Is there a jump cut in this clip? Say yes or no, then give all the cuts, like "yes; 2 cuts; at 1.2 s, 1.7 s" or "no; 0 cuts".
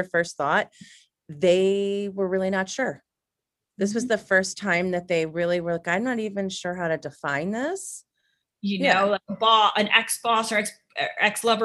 yes; 1 cut; at 8.4 s